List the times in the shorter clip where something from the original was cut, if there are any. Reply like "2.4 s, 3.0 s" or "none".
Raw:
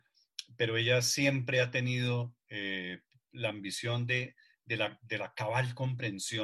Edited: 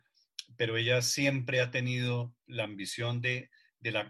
2.4 s